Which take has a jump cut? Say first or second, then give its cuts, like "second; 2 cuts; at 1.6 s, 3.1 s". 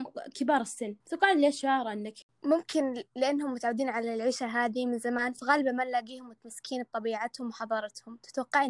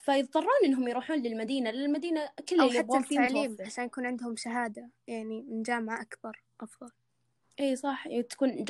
first; 1 cut; at 1.0 s